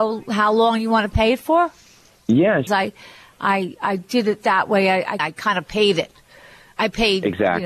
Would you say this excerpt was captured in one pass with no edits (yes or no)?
no